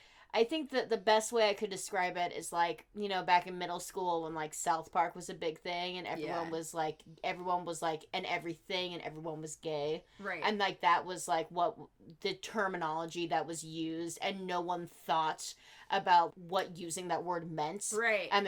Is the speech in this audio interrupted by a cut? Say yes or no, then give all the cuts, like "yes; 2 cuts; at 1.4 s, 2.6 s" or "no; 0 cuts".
yes; 1 cut; at 16.3 s